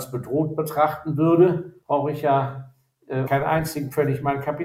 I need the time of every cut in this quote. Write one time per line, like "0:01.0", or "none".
0:01.8
0:03.3